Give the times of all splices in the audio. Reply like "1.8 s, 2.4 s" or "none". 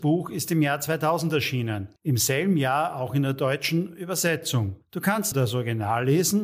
2.0 s, 5.3 s